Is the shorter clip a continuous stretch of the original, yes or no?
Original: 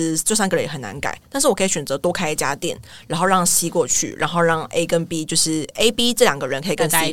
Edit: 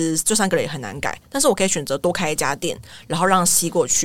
yes